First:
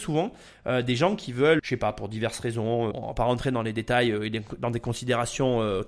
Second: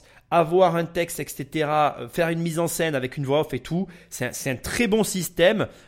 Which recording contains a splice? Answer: first; 2 cuts; at 1.6 s, 2.9 s

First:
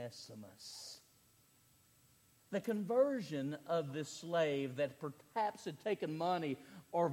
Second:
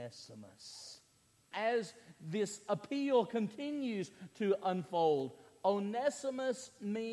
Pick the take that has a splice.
second; 1 cut; at 1.5 s

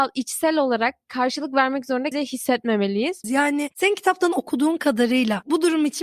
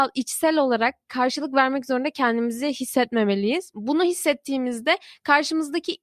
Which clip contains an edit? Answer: first; 2 cuts; at 2.1 s, 3.2 s

